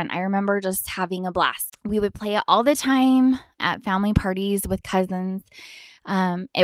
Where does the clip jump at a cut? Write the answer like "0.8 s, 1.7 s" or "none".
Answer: 1.7 s, 3.6 s